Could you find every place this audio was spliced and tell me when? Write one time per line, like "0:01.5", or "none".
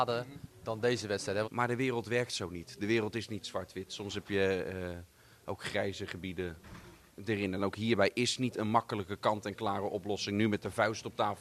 0:01.4